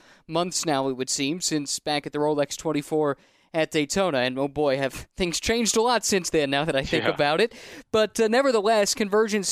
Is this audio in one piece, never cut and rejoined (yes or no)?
yes